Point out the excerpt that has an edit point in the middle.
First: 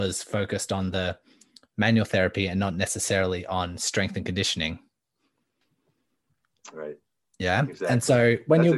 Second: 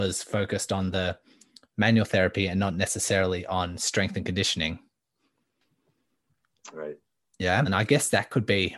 second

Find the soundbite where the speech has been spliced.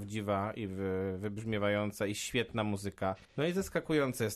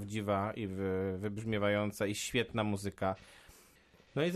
first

